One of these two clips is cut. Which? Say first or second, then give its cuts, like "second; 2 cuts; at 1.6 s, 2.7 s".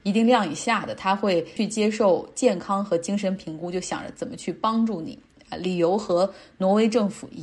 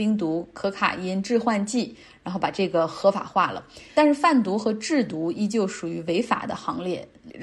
second; 1 cut; at 3.9 s